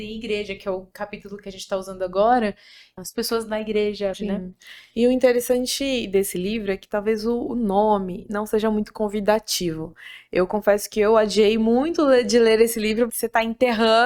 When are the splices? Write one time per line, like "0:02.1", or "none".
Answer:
0:03.0
0:04.1
0:13.1